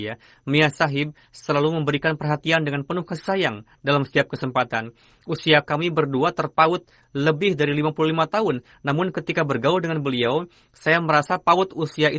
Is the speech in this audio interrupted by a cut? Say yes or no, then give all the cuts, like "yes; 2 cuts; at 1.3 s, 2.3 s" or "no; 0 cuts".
no; 0 cuts